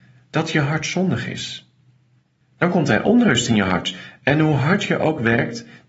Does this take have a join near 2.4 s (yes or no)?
yes